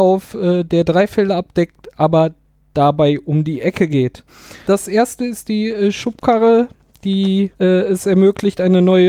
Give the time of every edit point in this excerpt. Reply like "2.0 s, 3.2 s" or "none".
4.6 s, 7.5 s